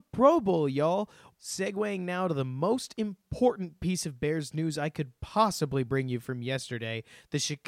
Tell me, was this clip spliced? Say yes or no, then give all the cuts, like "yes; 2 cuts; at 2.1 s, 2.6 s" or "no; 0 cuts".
yes; 1 cut; at 1.3 s